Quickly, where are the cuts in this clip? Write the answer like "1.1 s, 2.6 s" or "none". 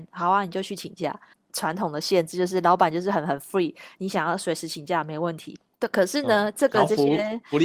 1.3 s, 4.0 s, 5.7 s